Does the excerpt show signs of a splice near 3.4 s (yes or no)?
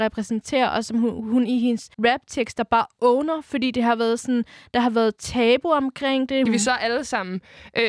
no